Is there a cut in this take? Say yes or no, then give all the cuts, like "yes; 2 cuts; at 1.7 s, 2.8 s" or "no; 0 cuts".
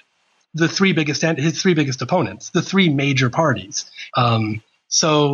yes; 1 cut; at 4.1 s